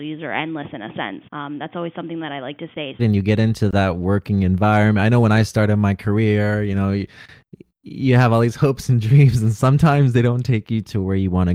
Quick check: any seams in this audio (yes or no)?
yes